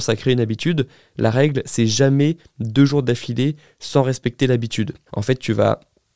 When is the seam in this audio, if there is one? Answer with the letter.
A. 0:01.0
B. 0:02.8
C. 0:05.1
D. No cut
C